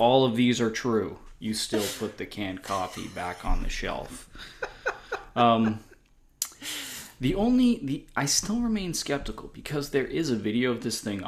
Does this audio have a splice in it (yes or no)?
no